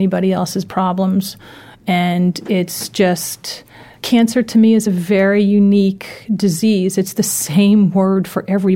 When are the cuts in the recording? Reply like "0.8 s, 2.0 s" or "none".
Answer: none

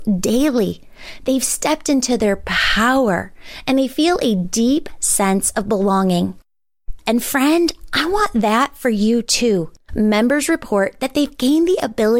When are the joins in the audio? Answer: 7.0 s, 9.9 s

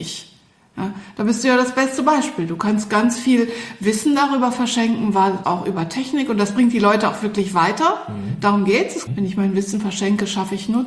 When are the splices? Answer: 5.4 s, 9.1 s

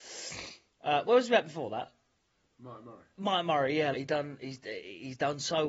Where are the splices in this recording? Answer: 3.9 s

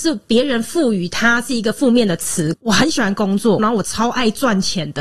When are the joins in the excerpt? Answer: 2.5 s, 3.6 s

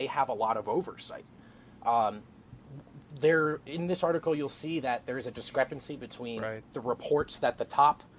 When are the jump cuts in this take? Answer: none

